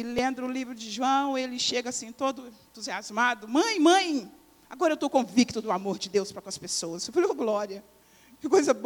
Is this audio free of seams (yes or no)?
yes